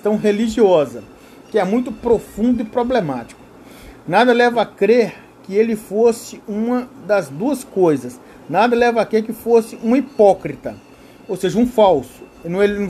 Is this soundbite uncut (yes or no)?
yes